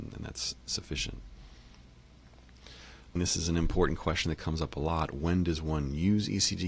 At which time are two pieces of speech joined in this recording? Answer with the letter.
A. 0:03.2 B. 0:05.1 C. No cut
A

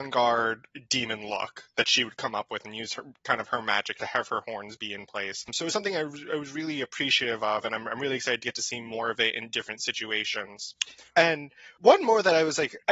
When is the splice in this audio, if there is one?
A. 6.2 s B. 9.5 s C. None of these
C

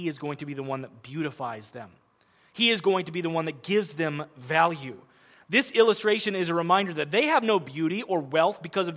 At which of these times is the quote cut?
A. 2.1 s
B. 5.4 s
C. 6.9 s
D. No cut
D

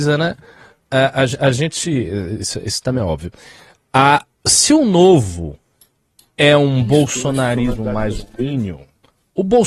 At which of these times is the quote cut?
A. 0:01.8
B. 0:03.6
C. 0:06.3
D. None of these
D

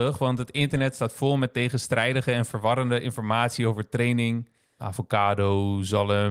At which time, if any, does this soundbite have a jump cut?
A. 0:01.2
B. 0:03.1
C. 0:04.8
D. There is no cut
C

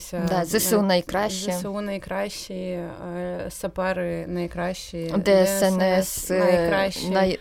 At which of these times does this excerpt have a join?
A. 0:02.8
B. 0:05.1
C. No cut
C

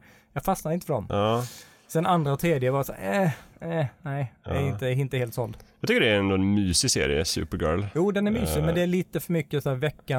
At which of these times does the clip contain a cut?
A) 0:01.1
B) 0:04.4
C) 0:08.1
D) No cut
A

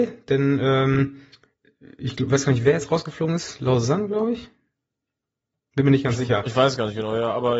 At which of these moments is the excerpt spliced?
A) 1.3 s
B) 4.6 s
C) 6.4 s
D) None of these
D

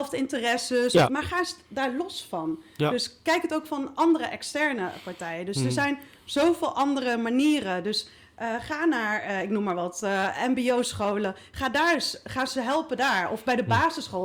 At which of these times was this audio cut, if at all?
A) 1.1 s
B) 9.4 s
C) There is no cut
A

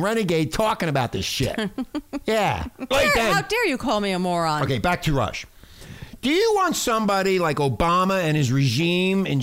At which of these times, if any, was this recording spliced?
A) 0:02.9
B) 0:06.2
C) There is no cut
A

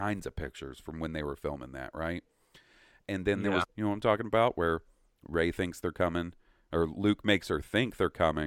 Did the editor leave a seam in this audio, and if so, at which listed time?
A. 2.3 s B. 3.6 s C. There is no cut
B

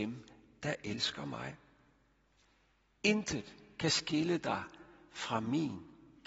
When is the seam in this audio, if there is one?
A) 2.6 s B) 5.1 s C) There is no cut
C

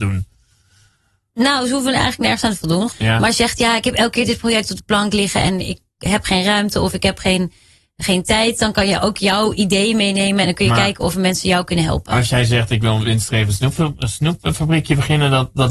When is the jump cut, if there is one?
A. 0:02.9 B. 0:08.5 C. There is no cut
A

